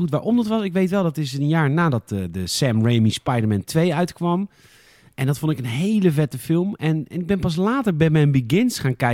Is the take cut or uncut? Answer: uncut